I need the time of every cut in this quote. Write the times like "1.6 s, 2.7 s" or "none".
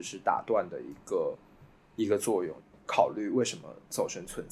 2.6 s